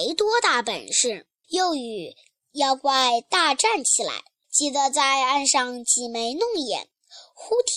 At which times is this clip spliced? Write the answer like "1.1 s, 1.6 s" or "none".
1.4 s, 4.4 s